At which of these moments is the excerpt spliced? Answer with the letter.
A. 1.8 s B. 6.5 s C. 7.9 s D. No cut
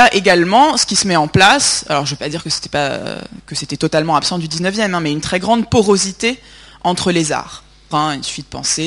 C